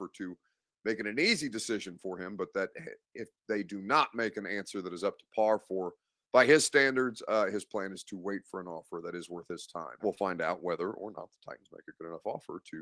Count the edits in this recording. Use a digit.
1